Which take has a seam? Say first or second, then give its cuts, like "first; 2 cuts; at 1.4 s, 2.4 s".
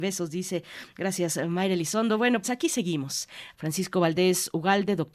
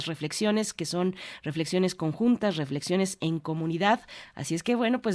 first; 2 cuts; at 2.4 s, 3.5 s